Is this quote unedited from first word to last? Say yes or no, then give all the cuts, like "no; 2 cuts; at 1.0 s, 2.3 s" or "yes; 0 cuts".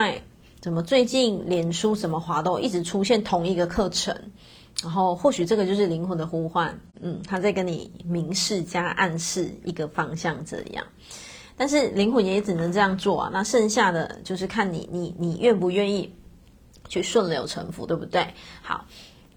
yes; 0 cuts